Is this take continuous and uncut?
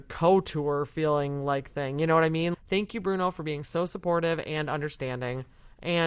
no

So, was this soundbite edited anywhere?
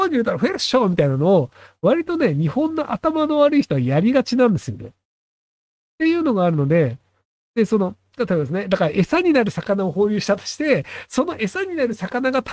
no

